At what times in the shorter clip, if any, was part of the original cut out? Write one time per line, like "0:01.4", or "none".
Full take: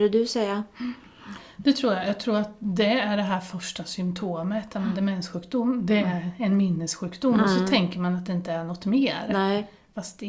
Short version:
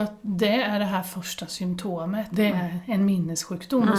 0:02.3